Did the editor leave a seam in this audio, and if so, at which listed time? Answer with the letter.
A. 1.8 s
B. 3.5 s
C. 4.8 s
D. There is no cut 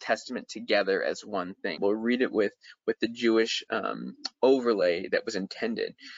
A